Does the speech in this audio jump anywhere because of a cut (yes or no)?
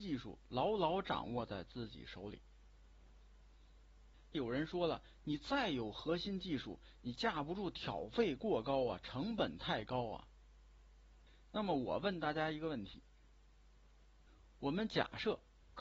no